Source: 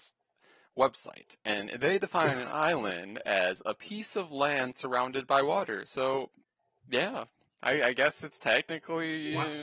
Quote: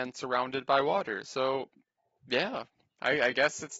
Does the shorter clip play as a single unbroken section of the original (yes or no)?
yes